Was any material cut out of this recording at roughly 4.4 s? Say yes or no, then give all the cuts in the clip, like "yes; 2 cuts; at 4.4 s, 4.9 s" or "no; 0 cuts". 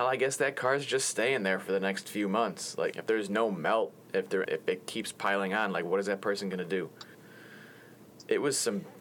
yes; 2 cuts; at 2.9 s, 4.4 s